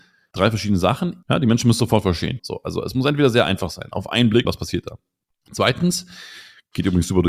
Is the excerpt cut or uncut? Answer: cut